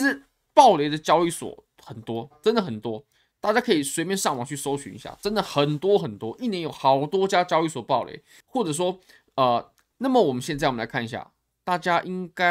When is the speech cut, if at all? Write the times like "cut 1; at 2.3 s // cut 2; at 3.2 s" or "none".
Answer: cut 1; at 8.4 s // cut 2; at 9.9 s